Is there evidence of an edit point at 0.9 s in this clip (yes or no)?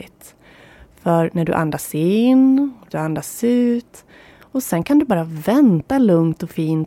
no